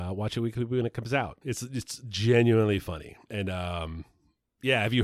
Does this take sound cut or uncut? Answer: cut